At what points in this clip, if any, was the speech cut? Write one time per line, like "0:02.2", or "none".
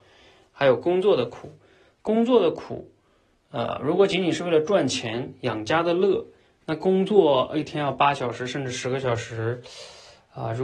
none